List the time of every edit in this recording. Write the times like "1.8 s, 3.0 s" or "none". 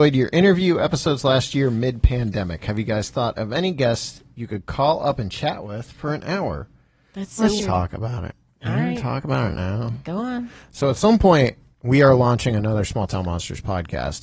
7.6 s